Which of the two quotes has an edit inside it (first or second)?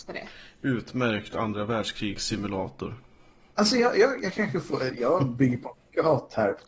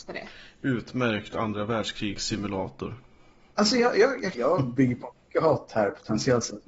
second